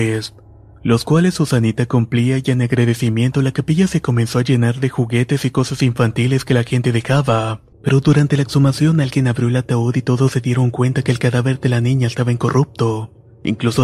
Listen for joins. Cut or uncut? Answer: cut